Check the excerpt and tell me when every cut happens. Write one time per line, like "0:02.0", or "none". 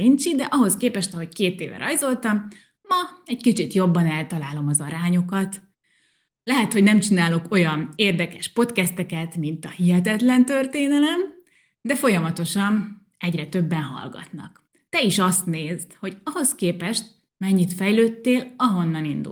none